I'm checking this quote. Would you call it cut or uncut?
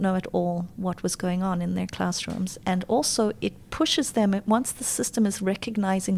uncut